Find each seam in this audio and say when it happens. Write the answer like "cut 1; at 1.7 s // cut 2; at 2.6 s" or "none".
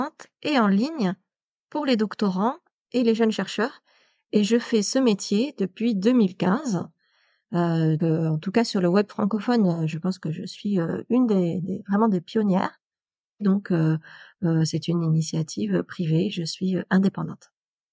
cut 1; at 8.0 s // cut 2; at 13.4 s